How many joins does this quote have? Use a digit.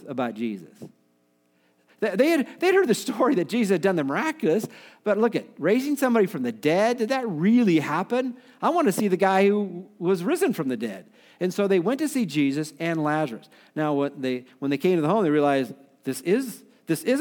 0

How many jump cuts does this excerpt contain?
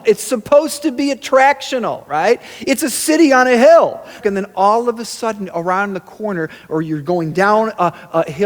1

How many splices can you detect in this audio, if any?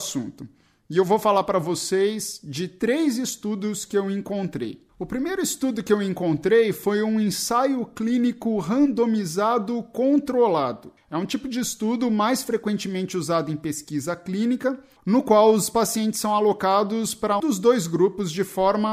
2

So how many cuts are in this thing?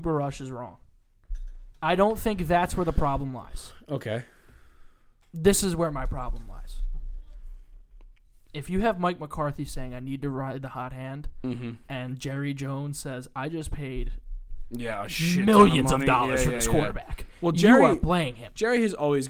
0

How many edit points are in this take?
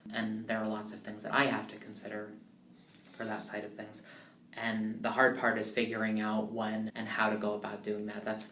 2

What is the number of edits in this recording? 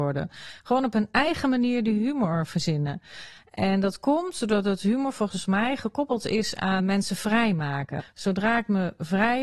2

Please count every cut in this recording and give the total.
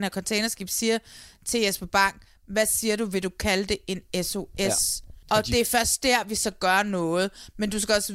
1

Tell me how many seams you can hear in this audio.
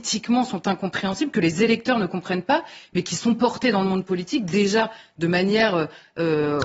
0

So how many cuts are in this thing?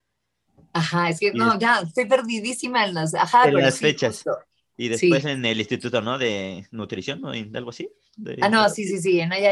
0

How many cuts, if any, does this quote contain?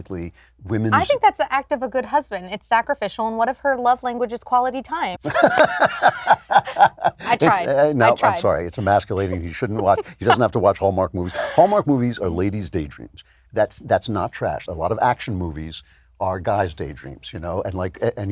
2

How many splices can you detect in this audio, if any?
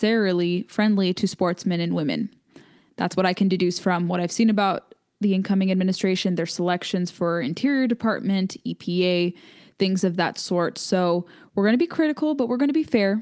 0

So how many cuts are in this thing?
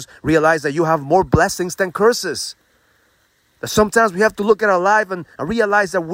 0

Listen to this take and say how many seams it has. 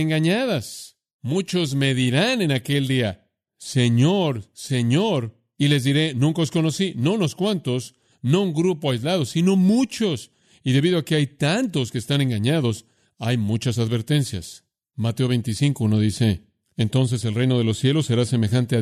0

